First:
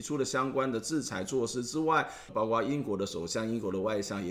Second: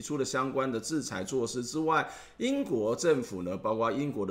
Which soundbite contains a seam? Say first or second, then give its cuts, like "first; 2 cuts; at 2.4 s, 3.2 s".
first; 1 cut; at 2.3 s